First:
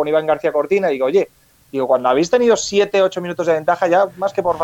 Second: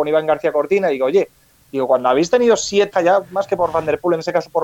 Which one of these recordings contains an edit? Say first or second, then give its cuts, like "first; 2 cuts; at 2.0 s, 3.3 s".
second; 1 cut; at 2.9 s